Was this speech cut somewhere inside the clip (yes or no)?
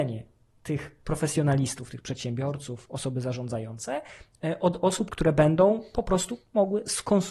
yes